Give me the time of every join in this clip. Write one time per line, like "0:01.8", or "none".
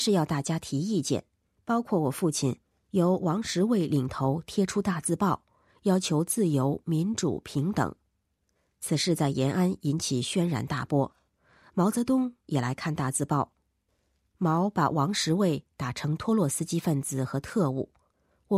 0:01.6